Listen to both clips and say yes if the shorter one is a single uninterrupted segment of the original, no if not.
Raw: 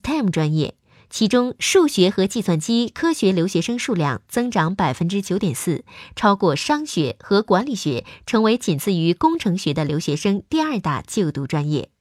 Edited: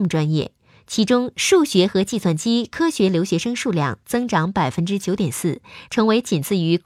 no